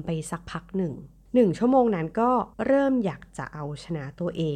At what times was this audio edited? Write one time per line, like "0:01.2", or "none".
0:02.5